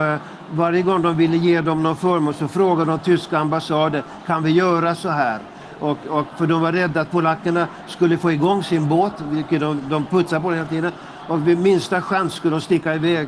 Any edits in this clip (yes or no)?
no